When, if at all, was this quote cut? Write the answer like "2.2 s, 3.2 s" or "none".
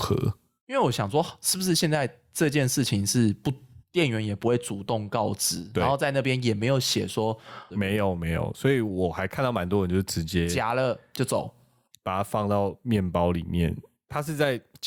7.7 s